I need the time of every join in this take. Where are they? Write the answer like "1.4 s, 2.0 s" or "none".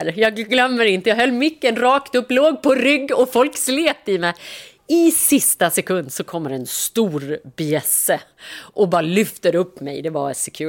none